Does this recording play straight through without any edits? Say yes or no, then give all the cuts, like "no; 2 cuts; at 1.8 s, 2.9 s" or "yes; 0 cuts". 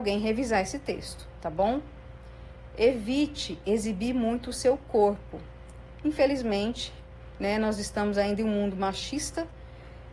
yes; 0 cuts